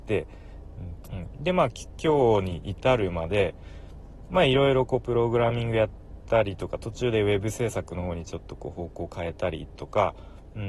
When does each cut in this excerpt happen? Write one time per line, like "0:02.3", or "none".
0:01.1